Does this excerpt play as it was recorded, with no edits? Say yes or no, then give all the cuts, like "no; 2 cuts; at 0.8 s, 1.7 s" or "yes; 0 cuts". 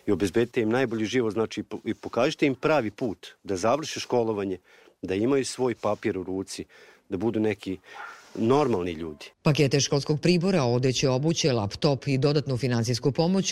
no; 1 cut; at 9.3 s